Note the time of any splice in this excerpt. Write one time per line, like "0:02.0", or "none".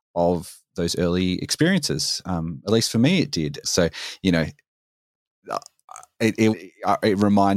0:03.6
0:06.5